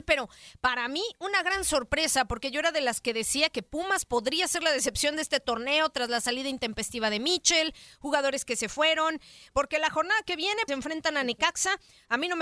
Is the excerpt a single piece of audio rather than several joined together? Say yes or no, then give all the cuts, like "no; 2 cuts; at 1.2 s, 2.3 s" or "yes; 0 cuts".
no; 2 cuts; at 9.5 s, 10.7 s